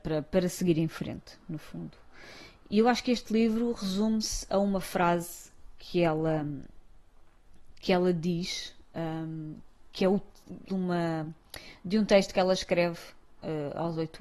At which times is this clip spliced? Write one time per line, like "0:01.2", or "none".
0:10.7